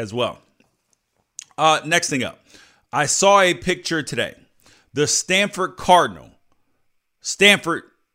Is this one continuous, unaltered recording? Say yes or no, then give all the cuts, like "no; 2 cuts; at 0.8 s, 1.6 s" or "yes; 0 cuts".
yes; 0 cuts